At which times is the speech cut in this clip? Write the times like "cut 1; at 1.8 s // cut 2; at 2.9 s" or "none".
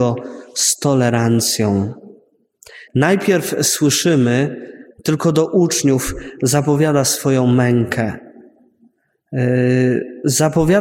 cut 1; at 2.9 s // cut 2; at 4.9 s